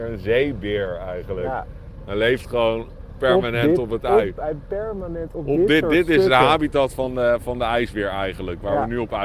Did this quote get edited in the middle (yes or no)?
no